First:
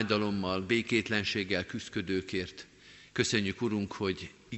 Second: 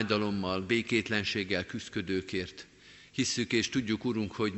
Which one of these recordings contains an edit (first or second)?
first